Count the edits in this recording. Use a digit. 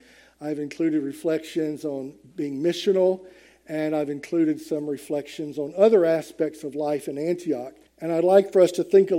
1